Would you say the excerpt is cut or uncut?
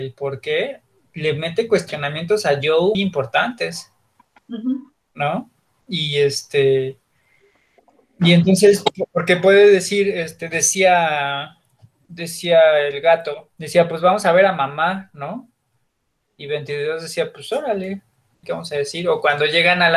cut